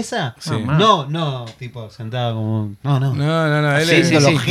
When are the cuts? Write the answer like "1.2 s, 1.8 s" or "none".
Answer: none